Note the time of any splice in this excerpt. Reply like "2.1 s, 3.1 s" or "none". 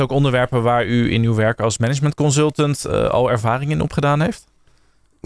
none